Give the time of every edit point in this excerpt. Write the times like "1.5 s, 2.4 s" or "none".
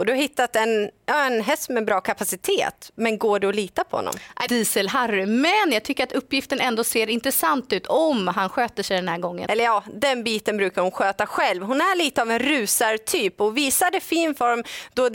4.5 s, 9.5 s